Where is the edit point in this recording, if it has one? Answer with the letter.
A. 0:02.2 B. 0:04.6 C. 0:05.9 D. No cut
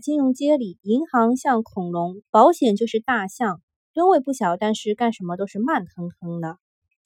A